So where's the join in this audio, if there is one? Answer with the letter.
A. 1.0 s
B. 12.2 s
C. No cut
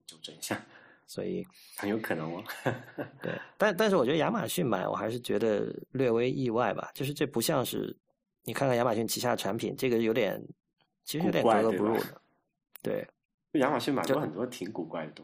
A